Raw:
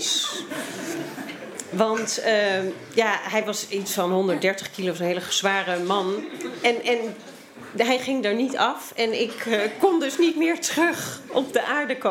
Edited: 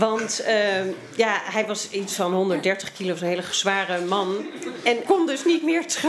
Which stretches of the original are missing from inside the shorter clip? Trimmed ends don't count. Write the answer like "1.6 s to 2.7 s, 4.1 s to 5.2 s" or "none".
6.8 s to 9.8 s